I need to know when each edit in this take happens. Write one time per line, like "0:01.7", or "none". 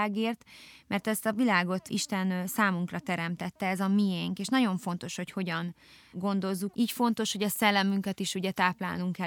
0:06.7